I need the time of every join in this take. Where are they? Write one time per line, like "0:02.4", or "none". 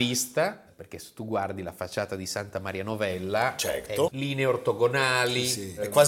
0:04.1